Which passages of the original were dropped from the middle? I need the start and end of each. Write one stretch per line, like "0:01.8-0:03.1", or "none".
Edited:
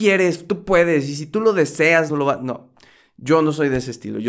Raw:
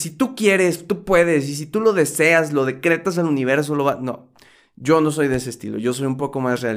0:02.5-0:03.7